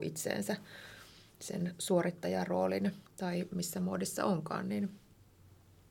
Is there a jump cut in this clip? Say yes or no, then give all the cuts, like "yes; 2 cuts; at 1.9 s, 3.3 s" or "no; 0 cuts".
yes; 1 cut; at 3.1 s